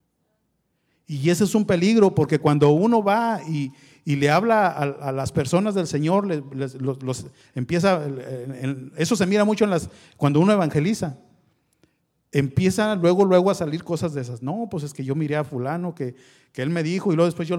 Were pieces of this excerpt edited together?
no; 0 cuts

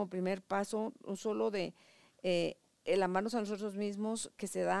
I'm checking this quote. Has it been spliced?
no; 0 cuts

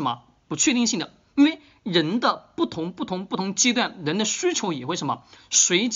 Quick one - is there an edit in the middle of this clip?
no; 0 cuts

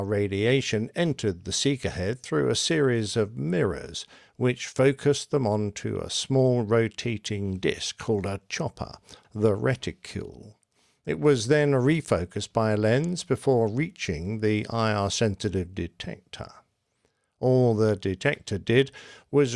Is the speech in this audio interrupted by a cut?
yes; 1 cut; at 9.2 s

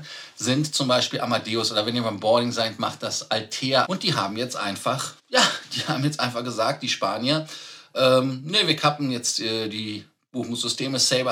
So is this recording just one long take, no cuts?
no; 2 cuts; at 3.8 s, 5.2 s

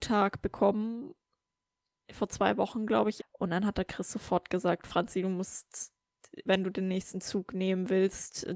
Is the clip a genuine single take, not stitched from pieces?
no; 2 cuts; at 3.2 s, 6.5 s

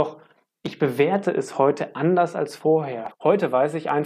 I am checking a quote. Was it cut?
yes; 1 cut; at 3.1 s

